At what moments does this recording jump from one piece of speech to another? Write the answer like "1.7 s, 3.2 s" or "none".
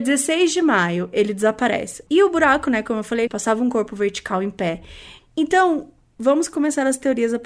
2.1 s, 3.3 s, 5.2 s